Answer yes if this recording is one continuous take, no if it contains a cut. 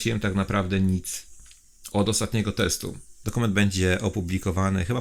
no